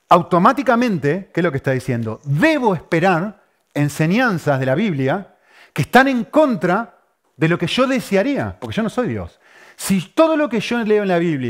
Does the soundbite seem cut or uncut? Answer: uncut